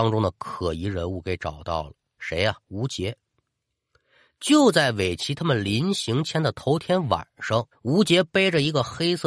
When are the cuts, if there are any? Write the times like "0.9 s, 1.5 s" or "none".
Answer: 2.6 s, 7.7 s

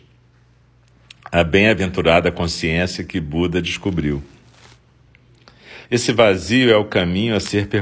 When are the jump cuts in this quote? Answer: 5.9 s

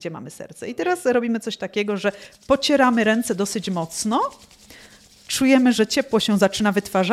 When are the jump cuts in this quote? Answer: none

